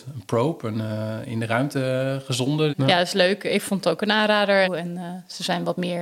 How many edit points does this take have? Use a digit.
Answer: 2